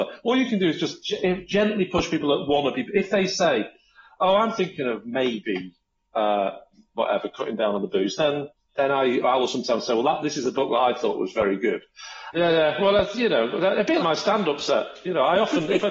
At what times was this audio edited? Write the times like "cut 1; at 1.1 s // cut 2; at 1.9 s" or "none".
cut 1; at 12.3 s // cut 2; at 14.0 s

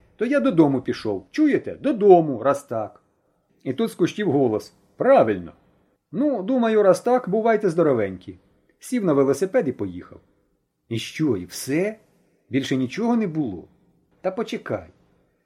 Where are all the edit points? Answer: none

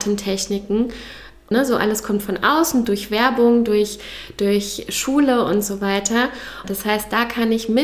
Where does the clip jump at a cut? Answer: cut 1; at 1.5 s // cut 2; at 6.6 s

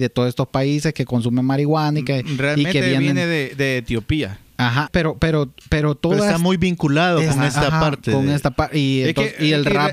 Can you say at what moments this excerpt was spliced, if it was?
cut 1; at 4.9 s

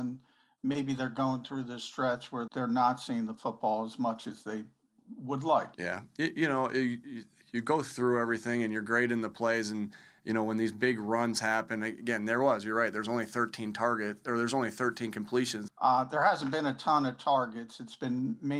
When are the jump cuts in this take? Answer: cut 1; at 2.5 s // cut 2; at 5.7 s // cut 3; at 15.7 s

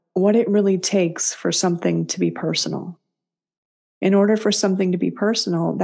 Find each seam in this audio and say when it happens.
none

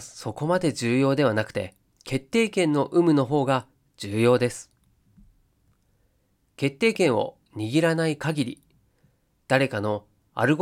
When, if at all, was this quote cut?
cut 1; at 2.0 s

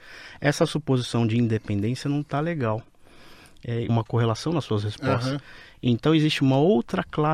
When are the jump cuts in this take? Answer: cut 1; at 3.9 s

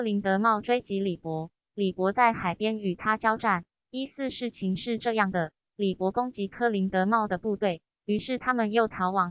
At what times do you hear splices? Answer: none

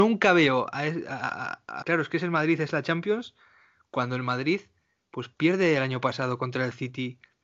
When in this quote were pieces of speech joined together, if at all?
cut 1; at 1.8 s

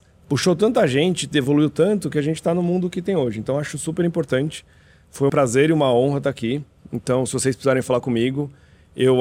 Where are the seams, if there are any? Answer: cut 1; at 5.3 s // cut 2; at 6.8 s

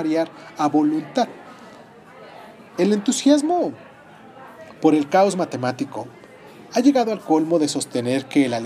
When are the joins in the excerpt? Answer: none

